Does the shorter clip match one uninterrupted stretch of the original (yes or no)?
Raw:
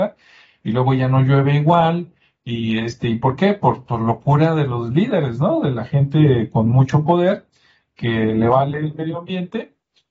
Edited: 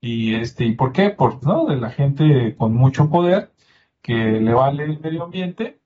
no